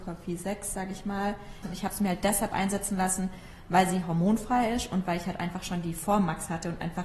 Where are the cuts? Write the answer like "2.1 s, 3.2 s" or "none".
1.6 s